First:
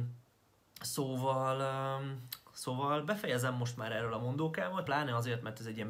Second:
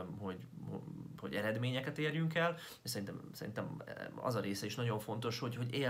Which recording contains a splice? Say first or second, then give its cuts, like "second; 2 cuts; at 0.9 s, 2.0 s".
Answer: first; 1 cut; at 4.9 s